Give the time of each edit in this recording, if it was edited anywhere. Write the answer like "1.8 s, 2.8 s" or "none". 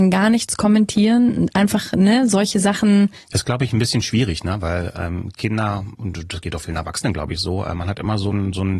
3.2 s